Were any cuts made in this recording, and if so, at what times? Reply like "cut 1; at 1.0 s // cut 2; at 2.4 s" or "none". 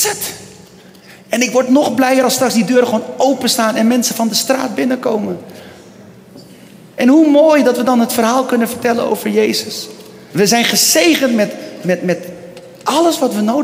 cut 1; at 10.3 s

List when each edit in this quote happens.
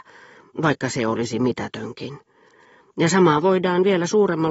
none

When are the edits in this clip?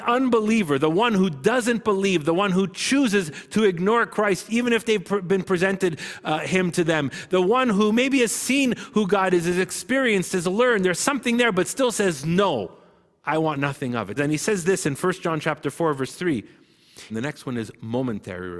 cut 1; at 14.2 s // cut 2; at 17.1 s

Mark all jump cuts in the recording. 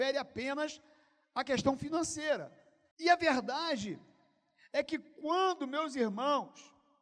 cut 1; at 2.9 s

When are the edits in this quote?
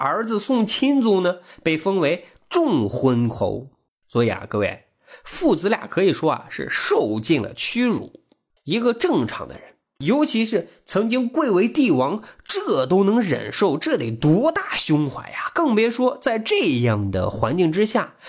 cut 1; at 8.6 s

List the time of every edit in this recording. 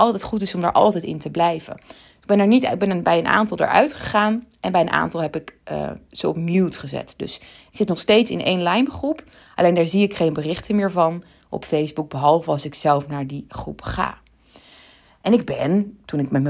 none

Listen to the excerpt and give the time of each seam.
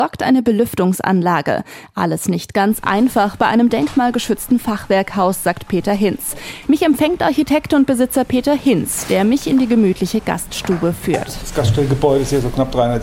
cut 1; at 6.6 s

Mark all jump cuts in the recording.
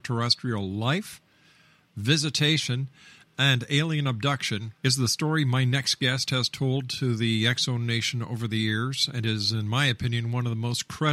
cut 1; at 4.8 s

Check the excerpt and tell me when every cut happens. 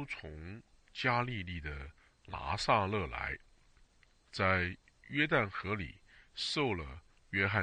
none

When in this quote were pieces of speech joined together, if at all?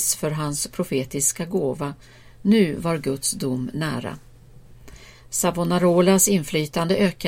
none

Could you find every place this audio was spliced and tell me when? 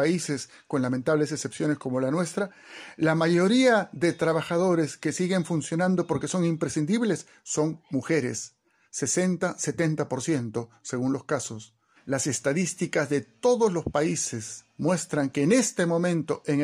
cut 1; at 12.0 s // cut 2; at 14.7 s

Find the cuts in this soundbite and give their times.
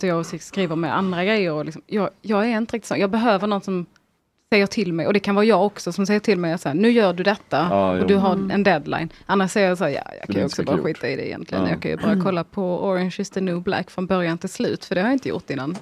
none

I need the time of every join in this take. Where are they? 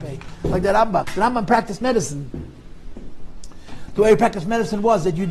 cut 1; at 1.0 s

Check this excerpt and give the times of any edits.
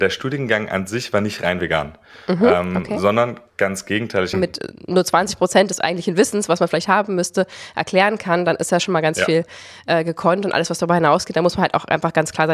cut 1; at 4.3 s

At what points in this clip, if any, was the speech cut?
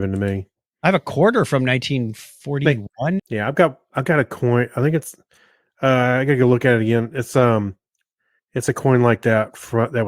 cut 1; at 3.2 s

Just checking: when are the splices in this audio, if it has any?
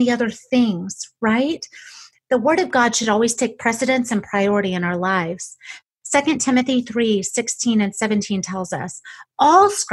none

